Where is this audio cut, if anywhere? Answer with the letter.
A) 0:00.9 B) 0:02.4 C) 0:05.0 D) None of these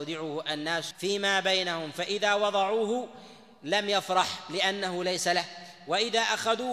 A